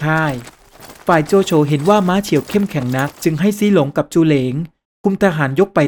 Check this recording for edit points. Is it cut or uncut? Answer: cut